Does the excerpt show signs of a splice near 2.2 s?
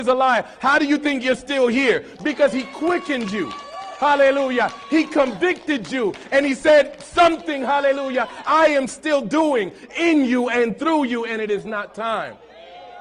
no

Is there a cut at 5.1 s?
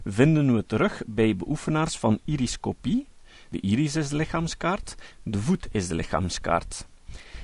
yes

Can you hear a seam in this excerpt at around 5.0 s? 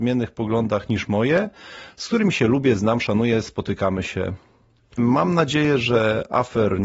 yes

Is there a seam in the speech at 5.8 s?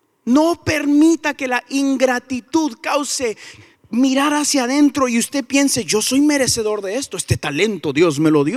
no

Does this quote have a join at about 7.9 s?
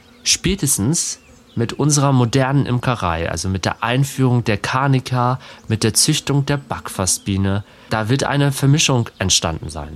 yes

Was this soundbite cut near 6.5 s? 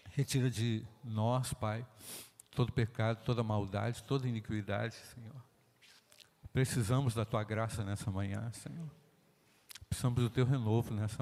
no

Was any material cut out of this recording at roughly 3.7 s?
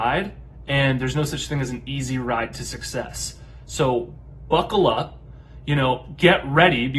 no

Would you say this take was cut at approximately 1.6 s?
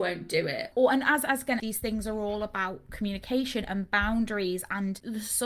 yes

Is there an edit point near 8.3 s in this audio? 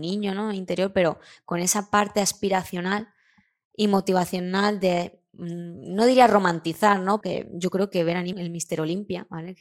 yes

